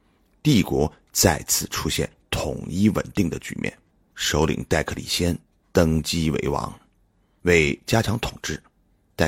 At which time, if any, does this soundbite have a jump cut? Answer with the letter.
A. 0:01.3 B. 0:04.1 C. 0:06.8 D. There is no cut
B